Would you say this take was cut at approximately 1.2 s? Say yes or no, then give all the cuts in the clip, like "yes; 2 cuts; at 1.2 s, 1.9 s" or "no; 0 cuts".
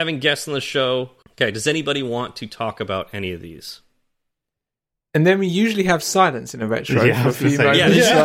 yes; 1 cut; at 1.2 s